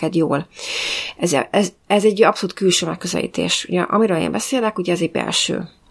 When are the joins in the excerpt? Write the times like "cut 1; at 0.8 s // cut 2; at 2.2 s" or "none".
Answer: none